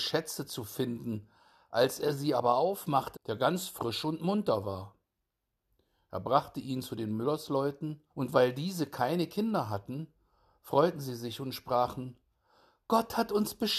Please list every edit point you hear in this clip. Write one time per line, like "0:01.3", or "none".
0:03.1
0:08.1